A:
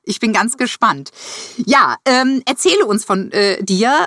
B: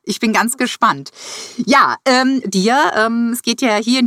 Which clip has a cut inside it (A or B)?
B